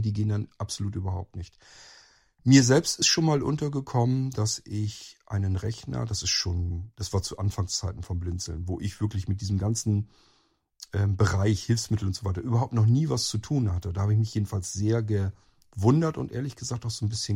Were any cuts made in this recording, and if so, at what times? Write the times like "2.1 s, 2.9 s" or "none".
none